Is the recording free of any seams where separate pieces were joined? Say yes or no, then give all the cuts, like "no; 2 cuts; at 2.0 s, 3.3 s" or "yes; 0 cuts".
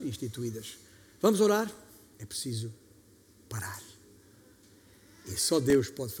no; 1 cut; at 2.1 s